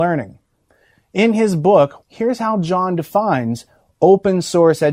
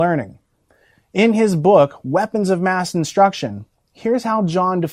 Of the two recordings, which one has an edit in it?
first; 1 cut; at 2.0 s

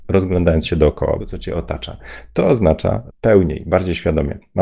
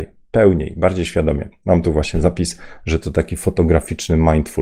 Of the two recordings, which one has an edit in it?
first; 2 cuts; at 1.2 s, 3.1 s

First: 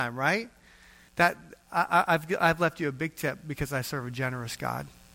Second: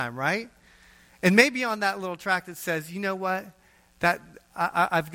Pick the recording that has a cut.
first; 1 cut; at 1.1 s

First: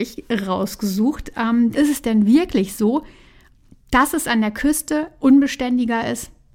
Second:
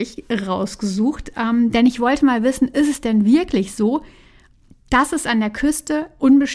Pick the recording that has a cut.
first; 1 cut; at 1.7 s

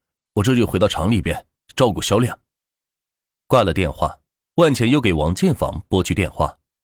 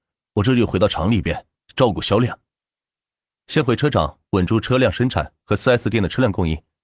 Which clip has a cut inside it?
second; 1 cut; at 3.4 s

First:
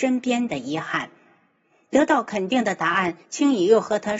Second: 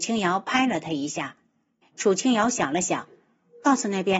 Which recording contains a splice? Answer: second; 1 cut; at 1.8 s

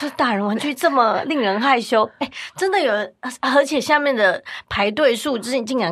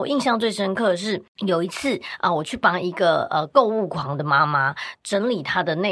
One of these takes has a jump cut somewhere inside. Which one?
second; 1 cut; at 1.3 s

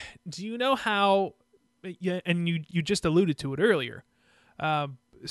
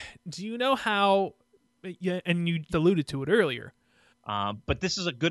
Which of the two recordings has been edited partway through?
second; 2 cuts; at 2.7 s, 4.1 s

